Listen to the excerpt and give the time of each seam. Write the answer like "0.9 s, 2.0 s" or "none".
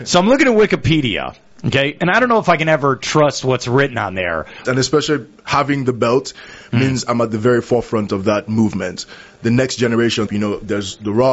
4.6 s, 10.3 s